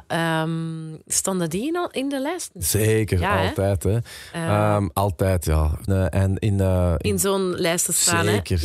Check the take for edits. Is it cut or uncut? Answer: cut